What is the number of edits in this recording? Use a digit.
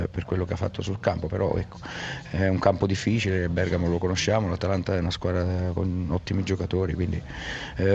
0